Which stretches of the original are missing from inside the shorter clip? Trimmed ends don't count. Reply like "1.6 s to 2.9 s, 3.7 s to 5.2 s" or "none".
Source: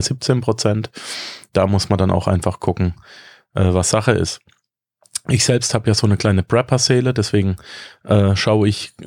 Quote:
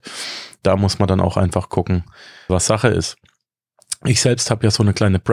3.4 s to 3.7 s